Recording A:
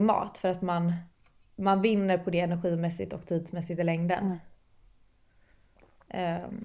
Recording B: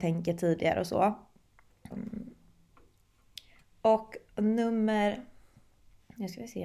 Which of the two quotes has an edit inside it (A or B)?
B